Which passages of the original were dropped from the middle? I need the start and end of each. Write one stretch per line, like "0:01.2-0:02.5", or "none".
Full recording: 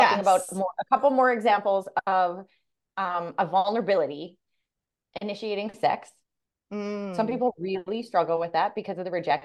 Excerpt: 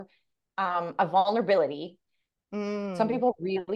0:04.8-0:06.6